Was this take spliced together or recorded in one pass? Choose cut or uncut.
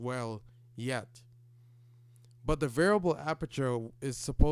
uncut